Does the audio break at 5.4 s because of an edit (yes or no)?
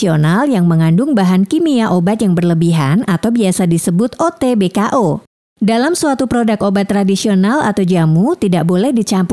no